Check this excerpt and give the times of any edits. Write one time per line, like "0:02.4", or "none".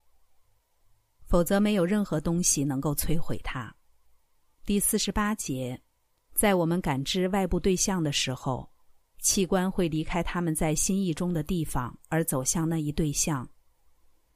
0:01.2
0:04.5
0:06.2